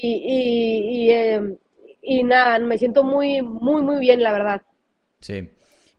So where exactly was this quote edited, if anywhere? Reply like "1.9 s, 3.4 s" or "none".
none

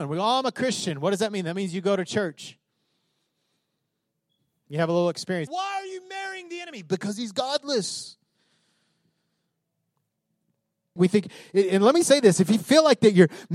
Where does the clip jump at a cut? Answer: 5.5 s, 11.0 s, 12.0 s

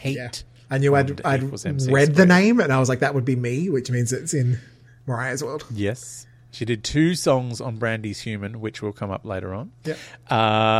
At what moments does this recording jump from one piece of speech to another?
none

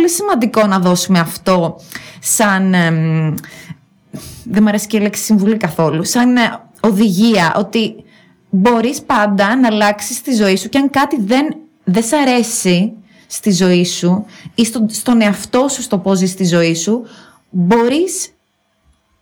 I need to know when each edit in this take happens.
none

